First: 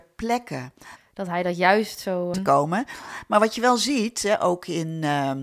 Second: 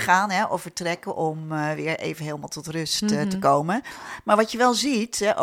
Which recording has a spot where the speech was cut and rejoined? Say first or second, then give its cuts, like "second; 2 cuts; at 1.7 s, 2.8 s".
first; 2 cuts; at 1.0 s, 2.3 s